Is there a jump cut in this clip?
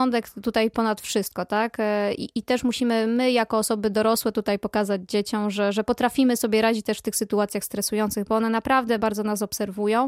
yes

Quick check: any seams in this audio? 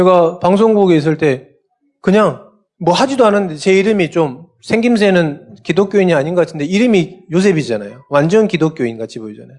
no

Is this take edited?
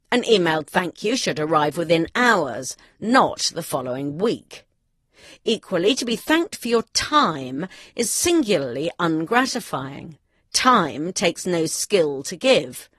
no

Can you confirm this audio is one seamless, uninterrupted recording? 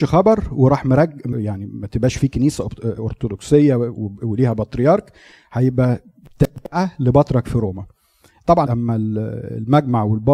no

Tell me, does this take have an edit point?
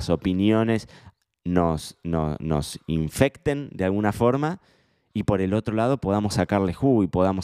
no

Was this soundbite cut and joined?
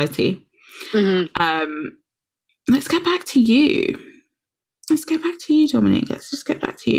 no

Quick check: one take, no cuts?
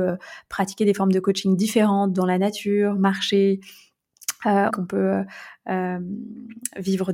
no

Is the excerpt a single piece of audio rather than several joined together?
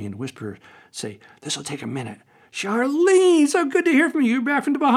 no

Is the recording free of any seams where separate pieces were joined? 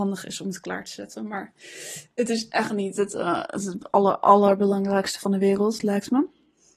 yes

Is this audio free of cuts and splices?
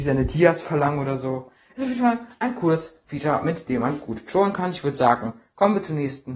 yes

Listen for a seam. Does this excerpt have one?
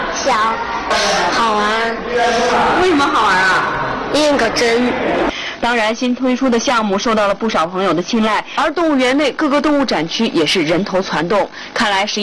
yes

